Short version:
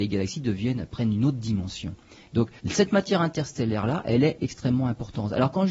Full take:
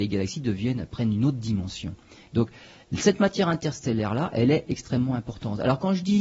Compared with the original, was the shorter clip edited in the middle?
yes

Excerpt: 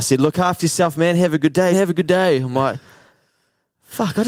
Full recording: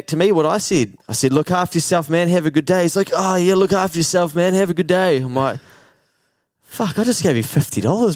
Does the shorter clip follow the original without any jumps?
no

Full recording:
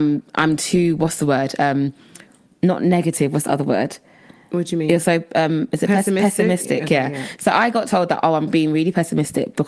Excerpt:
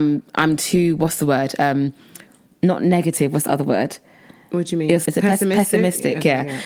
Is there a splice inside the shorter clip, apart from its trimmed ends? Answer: yes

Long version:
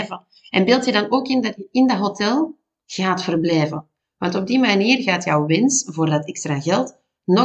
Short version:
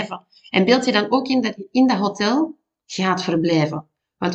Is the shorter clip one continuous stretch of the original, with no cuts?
yes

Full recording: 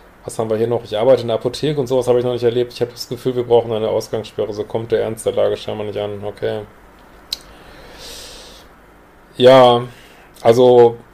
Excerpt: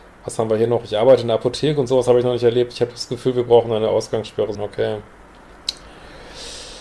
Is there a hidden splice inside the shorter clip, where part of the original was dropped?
yes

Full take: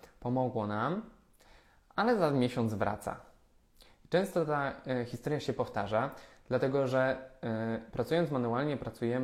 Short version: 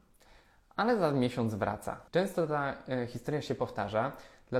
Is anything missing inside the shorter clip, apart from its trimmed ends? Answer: yes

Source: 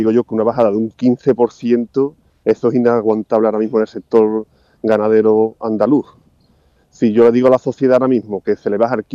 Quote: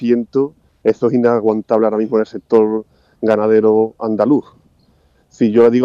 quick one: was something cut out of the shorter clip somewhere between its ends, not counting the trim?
no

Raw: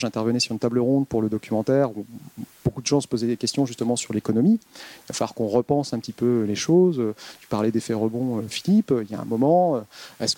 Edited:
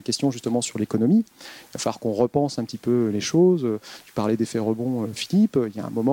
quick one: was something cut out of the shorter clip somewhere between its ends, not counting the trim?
no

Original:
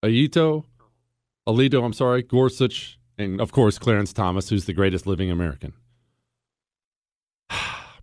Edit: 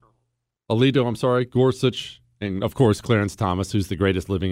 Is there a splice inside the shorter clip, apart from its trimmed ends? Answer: no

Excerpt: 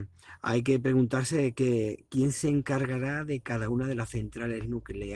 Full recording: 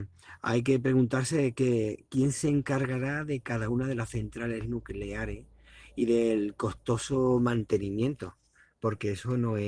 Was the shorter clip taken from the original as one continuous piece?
yes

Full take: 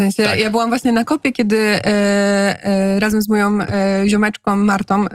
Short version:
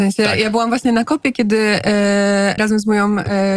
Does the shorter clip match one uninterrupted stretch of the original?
no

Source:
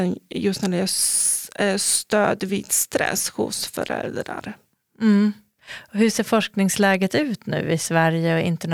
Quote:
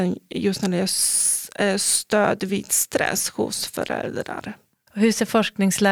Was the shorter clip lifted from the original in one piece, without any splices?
no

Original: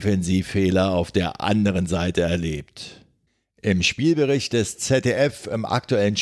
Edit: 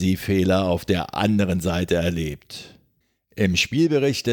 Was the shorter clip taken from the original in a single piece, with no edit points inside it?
yes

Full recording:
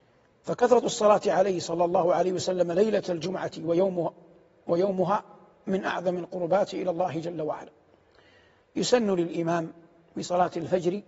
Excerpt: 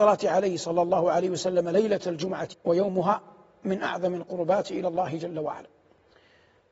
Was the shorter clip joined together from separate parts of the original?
yes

